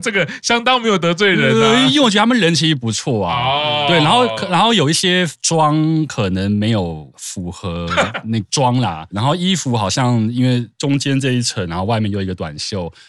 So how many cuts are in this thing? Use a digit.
1